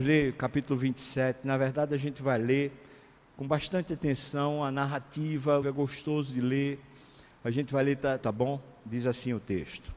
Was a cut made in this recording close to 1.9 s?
no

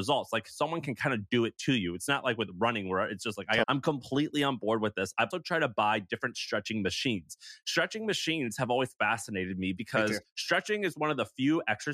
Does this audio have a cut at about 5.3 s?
yes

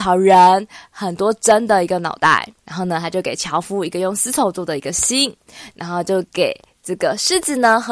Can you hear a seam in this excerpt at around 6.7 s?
no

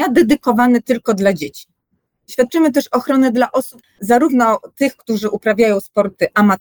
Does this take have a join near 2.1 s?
yes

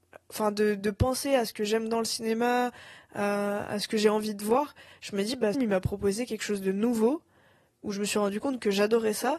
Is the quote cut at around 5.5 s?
yes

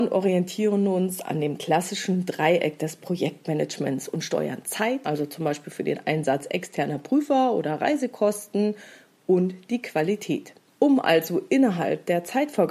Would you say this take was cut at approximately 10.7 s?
yes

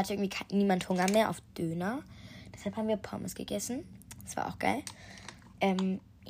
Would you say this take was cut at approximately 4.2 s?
no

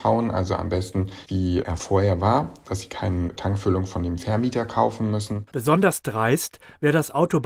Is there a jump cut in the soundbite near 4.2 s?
no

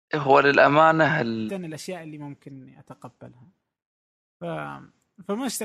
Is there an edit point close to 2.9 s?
no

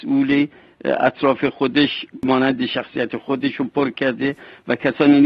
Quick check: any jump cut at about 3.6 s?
no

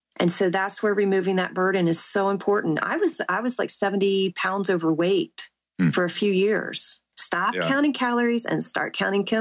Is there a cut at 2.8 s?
no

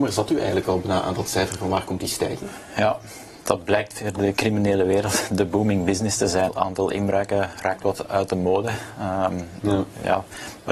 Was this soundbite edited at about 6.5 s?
yes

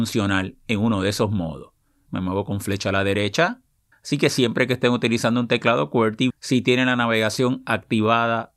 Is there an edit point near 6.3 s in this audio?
yes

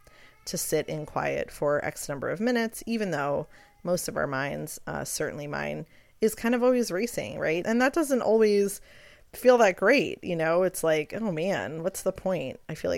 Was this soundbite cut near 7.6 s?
yes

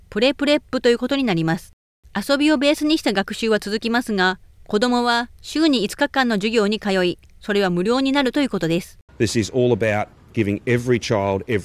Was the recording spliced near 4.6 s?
no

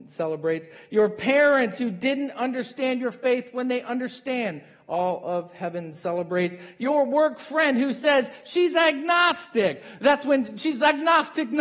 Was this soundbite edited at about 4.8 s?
no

